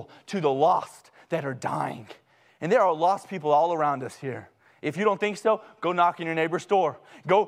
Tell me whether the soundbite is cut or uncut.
uncut